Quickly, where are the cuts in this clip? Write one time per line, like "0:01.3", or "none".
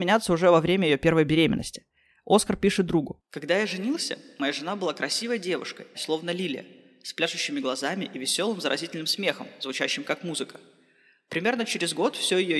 0:05.9